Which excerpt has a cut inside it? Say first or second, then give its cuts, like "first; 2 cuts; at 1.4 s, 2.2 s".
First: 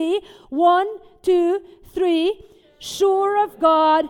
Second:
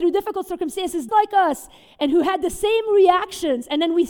second; 1 cut; at 1.1 s